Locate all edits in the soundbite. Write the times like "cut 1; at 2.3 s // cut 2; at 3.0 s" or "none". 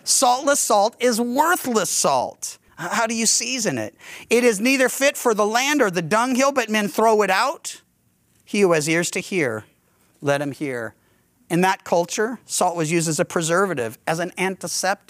cut 1; at 2.7 s